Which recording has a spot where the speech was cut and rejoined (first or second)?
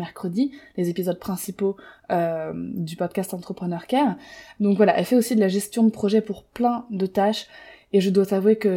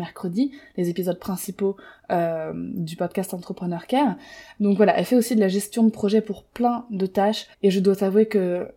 second